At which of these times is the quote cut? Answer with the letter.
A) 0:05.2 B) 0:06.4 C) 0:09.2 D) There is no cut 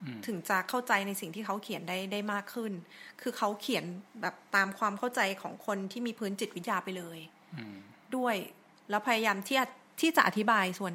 D